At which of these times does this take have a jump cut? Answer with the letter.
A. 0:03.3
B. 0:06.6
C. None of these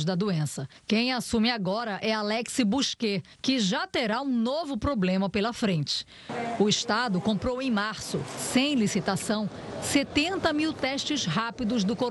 A